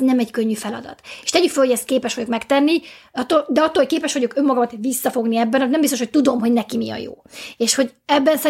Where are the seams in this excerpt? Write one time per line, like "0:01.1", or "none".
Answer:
none